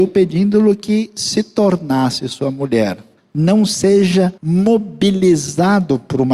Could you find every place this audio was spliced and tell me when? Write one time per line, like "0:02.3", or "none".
0:03.2
0:04.4